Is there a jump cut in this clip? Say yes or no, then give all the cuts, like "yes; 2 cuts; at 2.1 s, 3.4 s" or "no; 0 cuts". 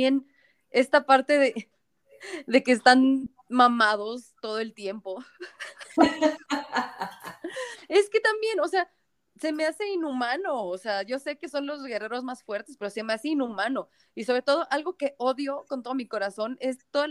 no; 0 cuts